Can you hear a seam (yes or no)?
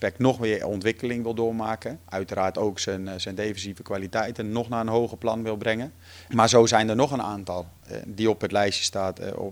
yes